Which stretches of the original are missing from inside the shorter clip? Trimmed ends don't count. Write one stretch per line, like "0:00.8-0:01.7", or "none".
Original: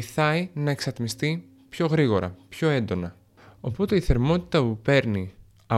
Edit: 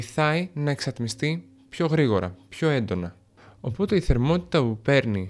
none